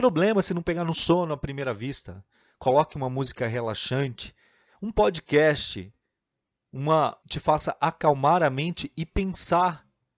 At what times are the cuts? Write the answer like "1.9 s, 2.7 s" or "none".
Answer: 7.2 s